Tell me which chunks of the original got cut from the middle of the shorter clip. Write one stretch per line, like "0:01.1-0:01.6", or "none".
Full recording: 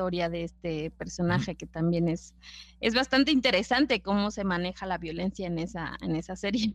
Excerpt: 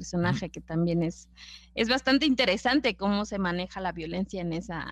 none